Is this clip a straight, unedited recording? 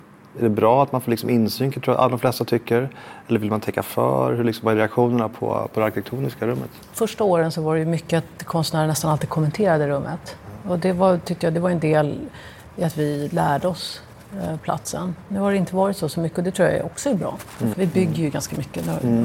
no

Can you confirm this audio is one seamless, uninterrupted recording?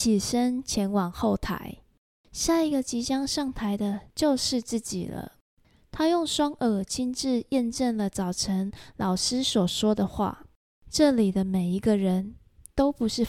yes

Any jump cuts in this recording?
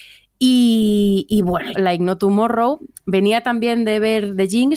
yes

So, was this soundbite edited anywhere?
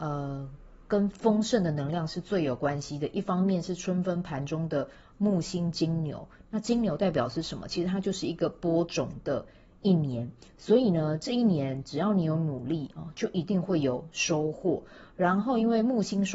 no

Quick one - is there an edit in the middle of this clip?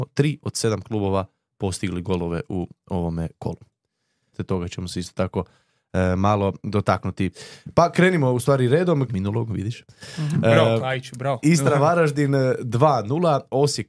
yes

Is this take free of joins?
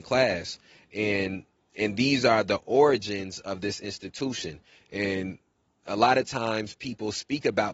yes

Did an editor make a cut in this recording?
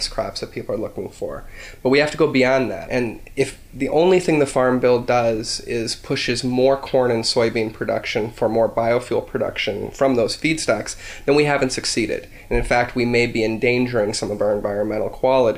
yes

